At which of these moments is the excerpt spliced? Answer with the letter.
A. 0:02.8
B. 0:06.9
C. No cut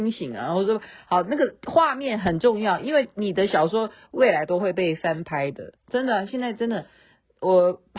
C